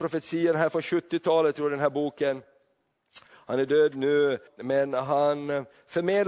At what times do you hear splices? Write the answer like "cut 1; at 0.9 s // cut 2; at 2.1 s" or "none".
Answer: cut 1; at 4.5 s